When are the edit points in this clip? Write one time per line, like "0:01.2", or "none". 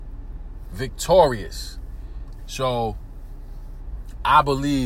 0:02.4